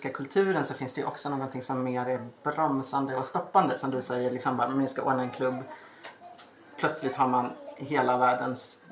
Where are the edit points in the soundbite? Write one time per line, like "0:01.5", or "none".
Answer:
none